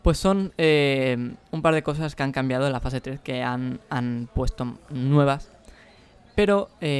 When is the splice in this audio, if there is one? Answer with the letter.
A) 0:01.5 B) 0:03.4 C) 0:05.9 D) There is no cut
D